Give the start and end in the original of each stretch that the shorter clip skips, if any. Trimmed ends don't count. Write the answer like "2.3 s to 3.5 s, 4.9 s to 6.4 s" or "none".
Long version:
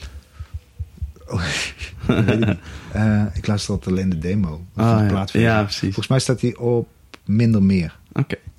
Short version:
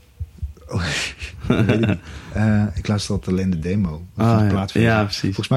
none